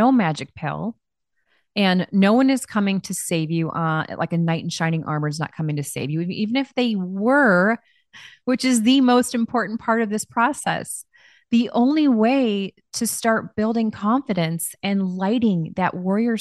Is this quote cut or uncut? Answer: cut